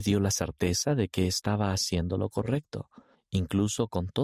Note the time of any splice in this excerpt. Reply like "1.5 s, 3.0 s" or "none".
3.1 s